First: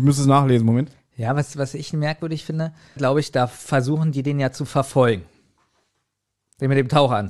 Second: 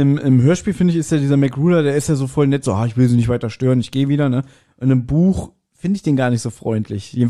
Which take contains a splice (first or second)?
first